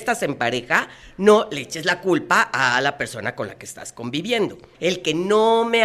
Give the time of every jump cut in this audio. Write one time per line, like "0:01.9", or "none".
0:04.7